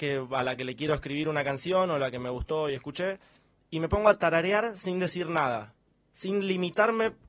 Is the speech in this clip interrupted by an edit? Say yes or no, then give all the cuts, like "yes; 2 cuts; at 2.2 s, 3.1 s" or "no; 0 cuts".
no; 0 cuts